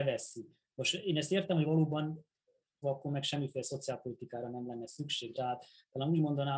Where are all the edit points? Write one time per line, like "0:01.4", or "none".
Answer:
0:02.8
0:05.3

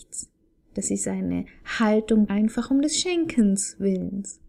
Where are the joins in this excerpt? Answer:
0:02.3

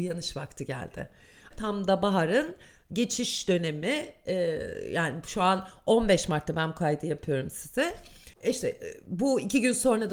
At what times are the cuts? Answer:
0:01.5
0:08.3

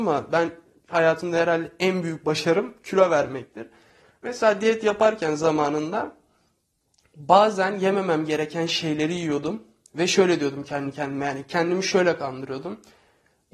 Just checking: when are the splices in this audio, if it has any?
none

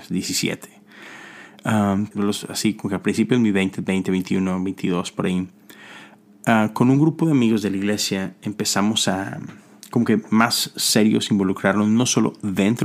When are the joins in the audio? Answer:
0:02.1

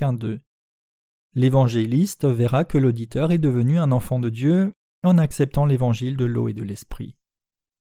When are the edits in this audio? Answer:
none

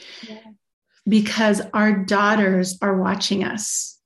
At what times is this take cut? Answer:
none

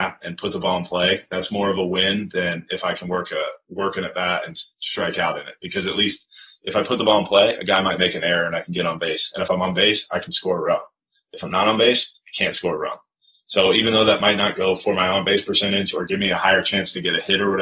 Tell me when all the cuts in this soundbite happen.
none

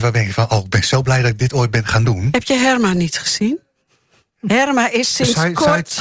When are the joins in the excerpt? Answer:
none

